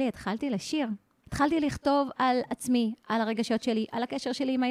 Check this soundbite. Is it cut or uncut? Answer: cut